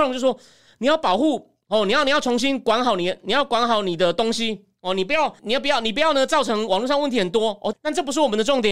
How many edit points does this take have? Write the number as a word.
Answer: two